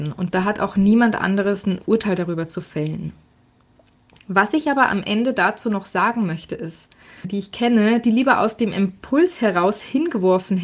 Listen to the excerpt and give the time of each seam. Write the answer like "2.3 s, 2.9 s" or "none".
7.2 s